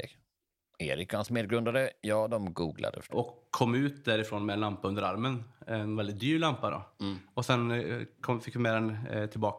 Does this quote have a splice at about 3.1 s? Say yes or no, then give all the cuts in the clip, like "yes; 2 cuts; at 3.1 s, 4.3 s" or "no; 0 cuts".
yes; 1 cut; at 3.1 s